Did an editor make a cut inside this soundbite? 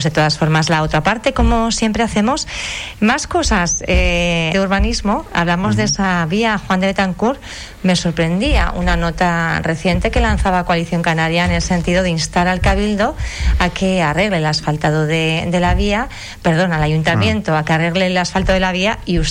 yes; 1 cut; at 4.5 s

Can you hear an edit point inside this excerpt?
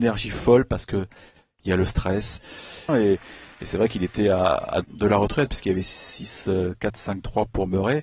yes; 2 cuts; at 2.9 s, 4.8 s

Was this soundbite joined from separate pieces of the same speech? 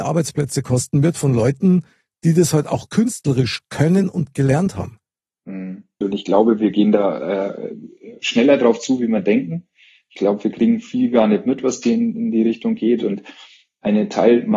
yes; 1 cut; at 6.0 s

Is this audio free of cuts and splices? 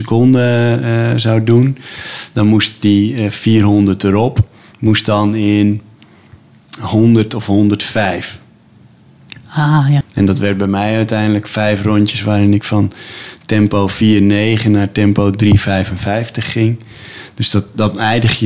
no; 1 cut; at 10.0 s

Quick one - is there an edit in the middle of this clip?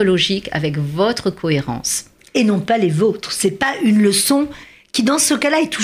no; 0 cuts

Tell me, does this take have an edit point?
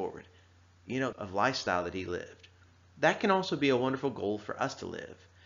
yes; 1 cut; at 1.1 s

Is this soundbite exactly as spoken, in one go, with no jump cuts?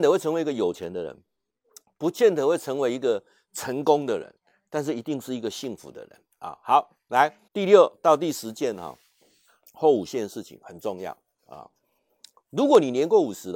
no; 1 cut; at 7.5 s

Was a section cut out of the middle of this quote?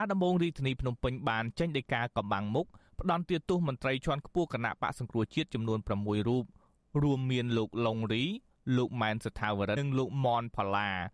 yes; 1 cut; at 9.8 s

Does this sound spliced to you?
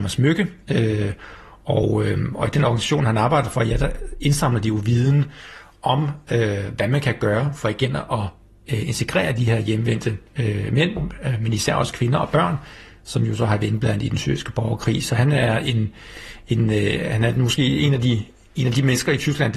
no; 0 cuts

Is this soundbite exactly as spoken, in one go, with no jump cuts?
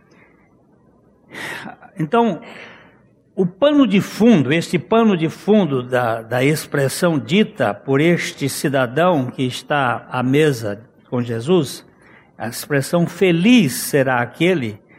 yes; 0 cuts

